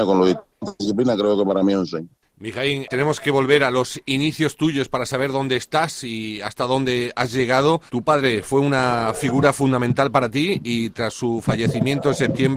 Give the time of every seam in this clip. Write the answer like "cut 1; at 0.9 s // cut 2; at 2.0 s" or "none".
cut 1; at 7.9 s